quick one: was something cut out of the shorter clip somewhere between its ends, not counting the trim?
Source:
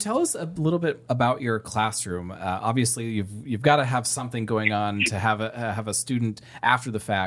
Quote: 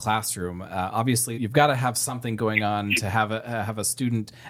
yes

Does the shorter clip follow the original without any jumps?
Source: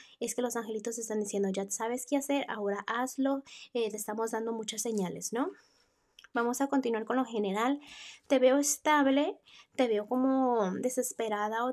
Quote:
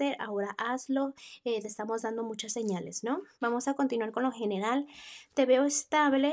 no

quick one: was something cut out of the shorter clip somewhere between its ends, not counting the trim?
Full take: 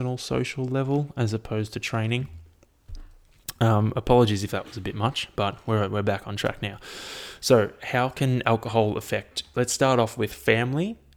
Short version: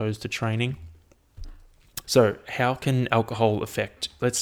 yes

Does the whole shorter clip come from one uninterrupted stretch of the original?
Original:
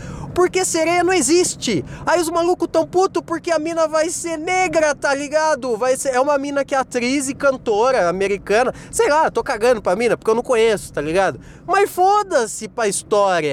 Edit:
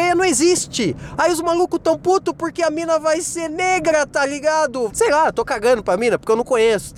no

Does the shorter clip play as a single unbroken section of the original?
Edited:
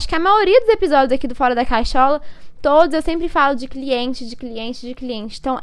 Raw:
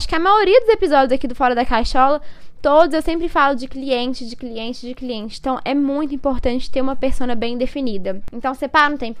yes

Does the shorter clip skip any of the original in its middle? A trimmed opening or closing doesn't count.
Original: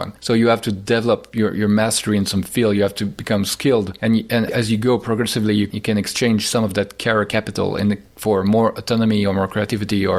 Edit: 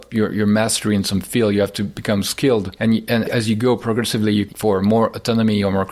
yes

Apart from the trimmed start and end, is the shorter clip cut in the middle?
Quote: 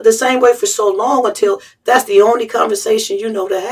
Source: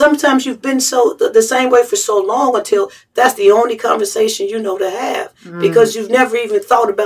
no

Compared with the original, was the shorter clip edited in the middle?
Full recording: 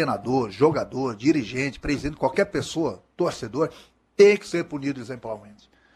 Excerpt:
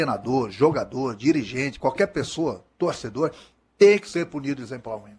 yes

